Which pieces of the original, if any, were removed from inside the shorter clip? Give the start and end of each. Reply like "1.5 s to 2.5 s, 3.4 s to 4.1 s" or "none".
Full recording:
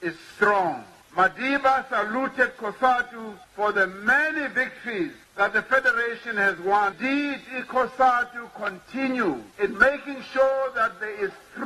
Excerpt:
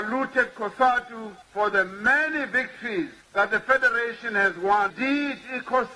none